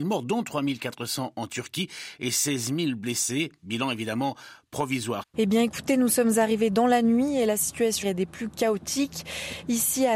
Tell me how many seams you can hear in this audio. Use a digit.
2